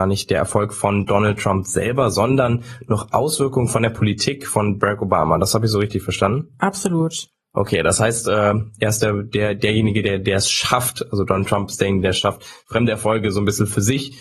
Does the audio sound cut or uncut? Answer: uncut